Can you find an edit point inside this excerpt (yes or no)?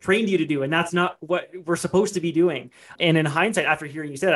yes